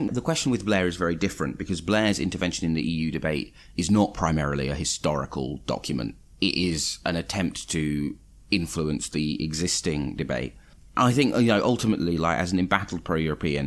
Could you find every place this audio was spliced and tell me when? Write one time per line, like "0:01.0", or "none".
none